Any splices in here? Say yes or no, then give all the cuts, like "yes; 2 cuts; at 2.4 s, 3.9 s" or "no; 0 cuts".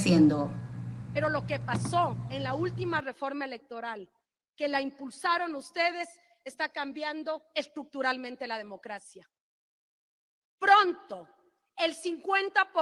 no; 0 cuts